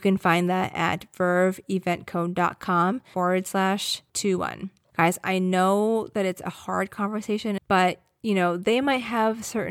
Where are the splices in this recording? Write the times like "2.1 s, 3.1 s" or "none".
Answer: 4.9 s, 7.6 s